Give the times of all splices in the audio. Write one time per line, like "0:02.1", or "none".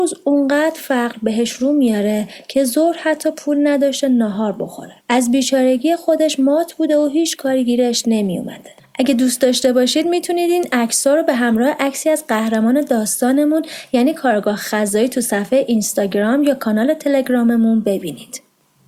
0:05.0
0:08.8